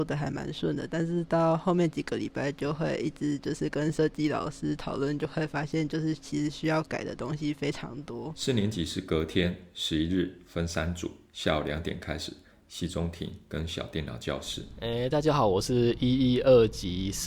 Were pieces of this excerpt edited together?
yes; 1 cut; at 12.5 s

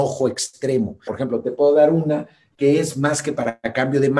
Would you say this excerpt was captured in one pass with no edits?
no; 2 cuts; at 1.1 s, 2.5 s

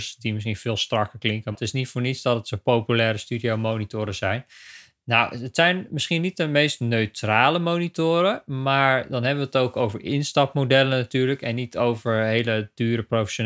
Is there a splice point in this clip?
yes; 1 cut; at 1.5 s

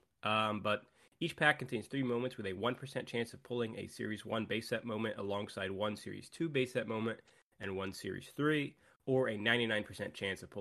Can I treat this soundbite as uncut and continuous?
yes; 0 cuts

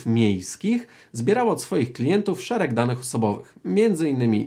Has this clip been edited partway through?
no; 0 cuts

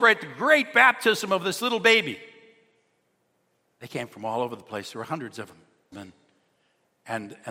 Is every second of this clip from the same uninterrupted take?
no; 1 cut; at 5.9 s

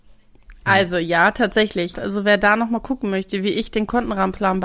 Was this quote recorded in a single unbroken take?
no; 1 cut; at 1.9 s

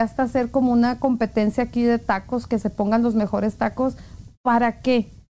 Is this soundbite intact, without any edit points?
yes; 0 cuts

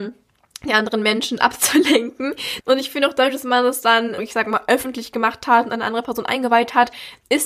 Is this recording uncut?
no; 2 cuts; at 2.6 s, 4.2 s

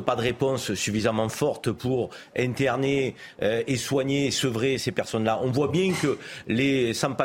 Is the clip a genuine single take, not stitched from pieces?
yes; 0 cuts

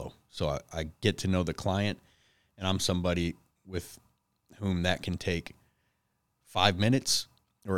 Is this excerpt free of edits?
yes; 0 cuts

